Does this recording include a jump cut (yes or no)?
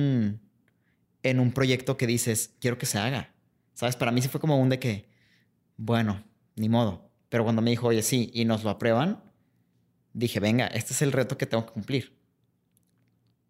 no